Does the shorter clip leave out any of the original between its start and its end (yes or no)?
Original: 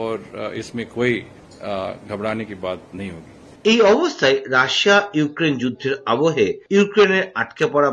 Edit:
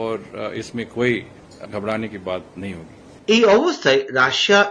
yes